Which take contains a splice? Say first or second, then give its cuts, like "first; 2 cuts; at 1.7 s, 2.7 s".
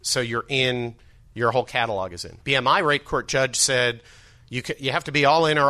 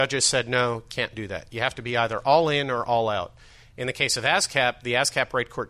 first; 1 cut; at 2.4 s